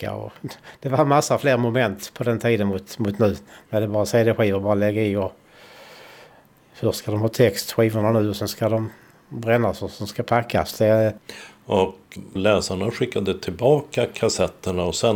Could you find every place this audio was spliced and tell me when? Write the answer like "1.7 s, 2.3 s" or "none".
none